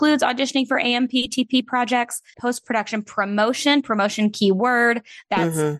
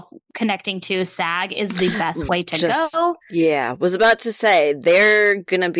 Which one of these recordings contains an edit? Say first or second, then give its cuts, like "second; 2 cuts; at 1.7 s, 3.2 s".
first; 1 cut; at 2.3 s